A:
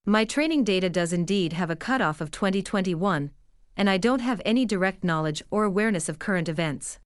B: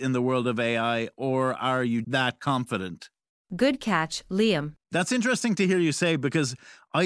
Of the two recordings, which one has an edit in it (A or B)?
B